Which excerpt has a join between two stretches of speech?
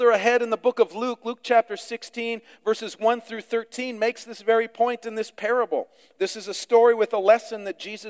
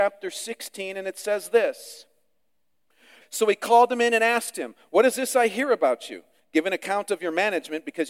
second; 1 cut; at 3.2 s

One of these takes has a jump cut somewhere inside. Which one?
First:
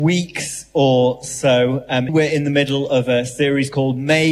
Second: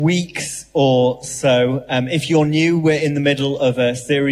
first; 1 cut; at 2.1 s

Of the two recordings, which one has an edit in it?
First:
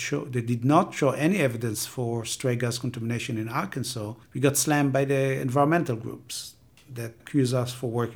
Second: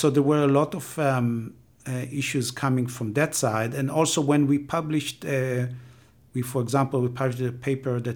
first; 2 cuts; at 4.2 s, 7.2 s

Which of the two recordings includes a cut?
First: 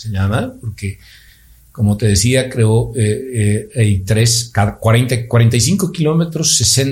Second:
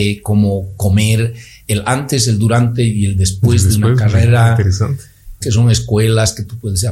second; 1 cut; at 5.4 s

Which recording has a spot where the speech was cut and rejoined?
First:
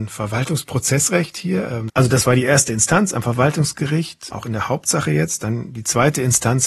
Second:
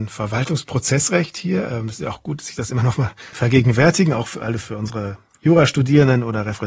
first; 2 cuts; at 1.9 s, 4.3 s

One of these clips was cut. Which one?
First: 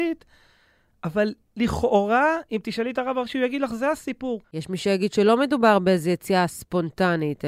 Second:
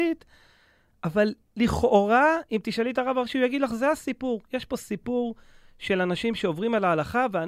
first; 1 cut; at 4.4 s

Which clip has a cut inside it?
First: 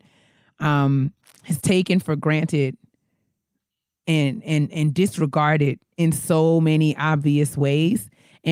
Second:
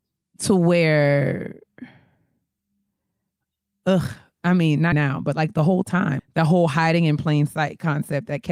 second; 2 cuts; at 4.9 s, 6.2 s

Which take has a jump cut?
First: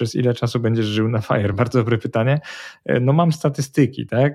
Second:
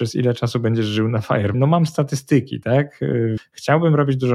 second; 2 cuts; at 1.5 s, 3.4 s

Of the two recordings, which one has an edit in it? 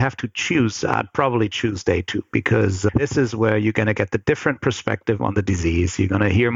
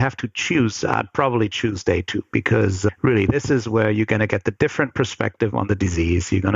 first; 1 cut; at 2.9 s

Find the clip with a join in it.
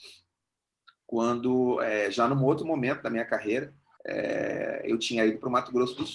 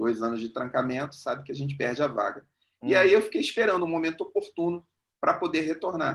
first; 1 cut; at 4.0 s

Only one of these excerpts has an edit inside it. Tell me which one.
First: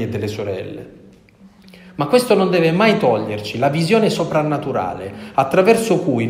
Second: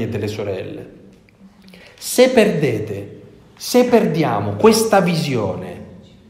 second; 1 cut; at 1.8 s

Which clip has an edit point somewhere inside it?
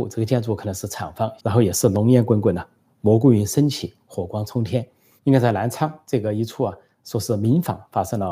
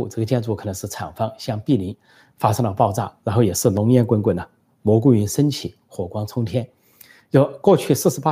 first; 2 cuts; at 1.4 s, 5.2 s

